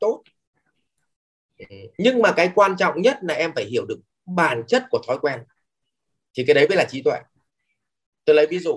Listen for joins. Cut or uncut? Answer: cut